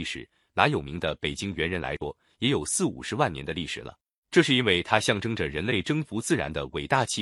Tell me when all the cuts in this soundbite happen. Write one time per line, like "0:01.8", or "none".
0:04.2